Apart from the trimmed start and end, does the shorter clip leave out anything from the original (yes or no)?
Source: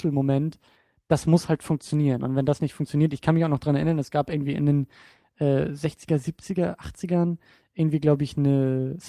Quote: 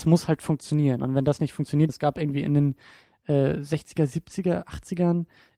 yes